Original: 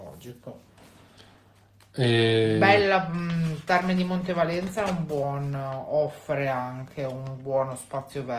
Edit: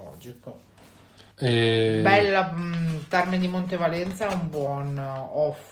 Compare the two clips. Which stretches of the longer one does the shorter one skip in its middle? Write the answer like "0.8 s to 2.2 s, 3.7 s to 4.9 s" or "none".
1.3 s to 1.9 s